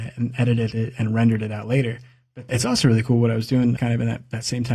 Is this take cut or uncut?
cut